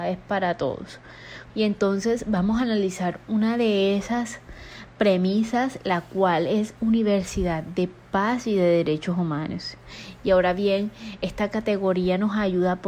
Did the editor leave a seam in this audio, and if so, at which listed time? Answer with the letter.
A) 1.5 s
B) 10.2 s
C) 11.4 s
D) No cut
A